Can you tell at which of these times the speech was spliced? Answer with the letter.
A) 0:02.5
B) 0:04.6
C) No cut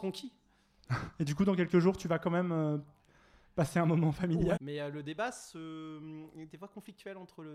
B